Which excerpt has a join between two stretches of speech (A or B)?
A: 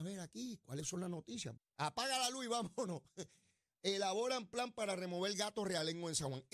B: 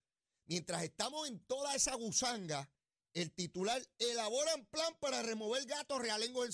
A